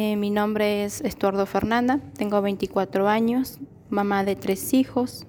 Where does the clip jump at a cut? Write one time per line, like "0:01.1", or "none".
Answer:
none